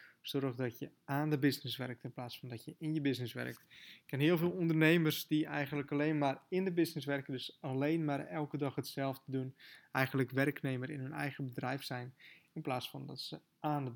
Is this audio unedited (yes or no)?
yes